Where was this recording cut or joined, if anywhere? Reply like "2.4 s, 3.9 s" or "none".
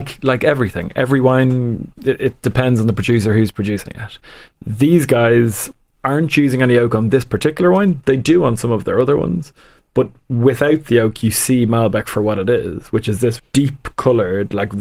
13.4 s